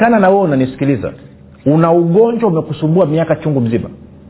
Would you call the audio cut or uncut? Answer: uncut